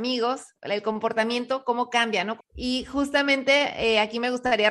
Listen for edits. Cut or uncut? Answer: cut